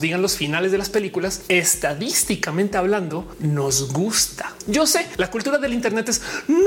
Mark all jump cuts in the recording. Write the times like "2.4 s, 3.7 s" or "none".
none